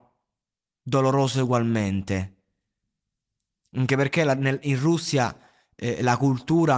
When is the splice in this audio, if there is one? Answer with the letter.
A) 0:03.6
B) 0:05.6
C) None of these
A